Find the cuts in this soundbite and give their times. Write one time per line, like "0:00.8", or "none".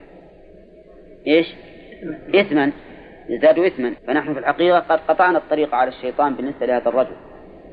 0:04.0